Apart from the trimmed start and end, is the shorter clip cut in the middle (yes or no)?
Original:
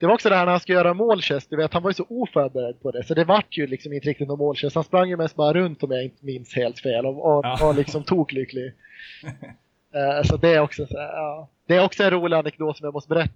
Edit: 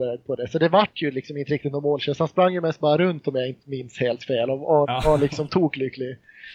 no